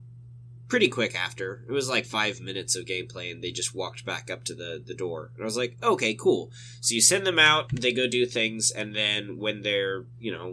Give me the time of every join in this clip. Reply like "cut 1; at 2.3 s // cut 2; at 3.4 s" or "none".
none